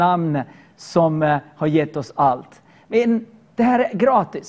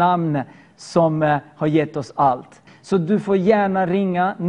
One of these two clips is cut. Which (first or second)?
second